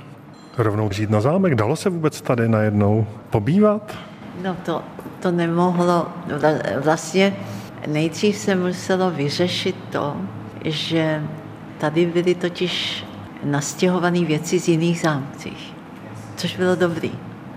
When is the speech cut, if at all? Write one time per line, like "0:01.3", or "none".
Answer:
none